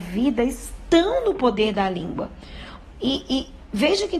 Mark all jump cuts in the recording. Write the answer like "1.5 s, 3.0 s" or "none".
2.9 s